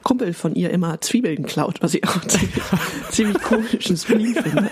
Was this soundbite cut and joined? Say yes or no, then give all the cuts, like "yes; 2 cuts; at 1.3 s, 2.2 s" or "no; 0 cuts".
no; 0 cuts